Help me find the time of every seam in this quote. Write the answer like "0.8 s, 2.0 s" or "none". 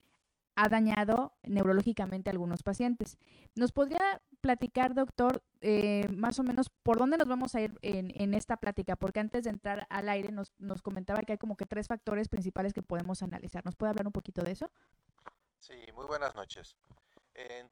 none

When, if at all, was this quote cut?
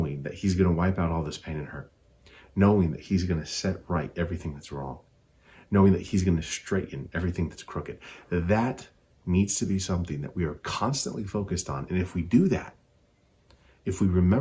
none

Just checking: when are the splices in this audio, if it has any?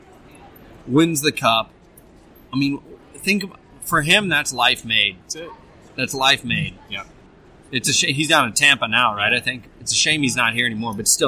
none

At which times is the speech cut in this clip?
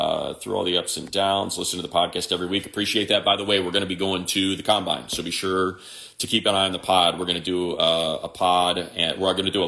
none

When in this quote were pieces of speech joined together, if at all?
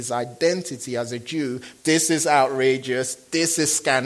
1.8 s

